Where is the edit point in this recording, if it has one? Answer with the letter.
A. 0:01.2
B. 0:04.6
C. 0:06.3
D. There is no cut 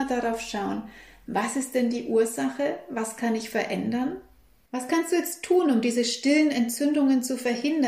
B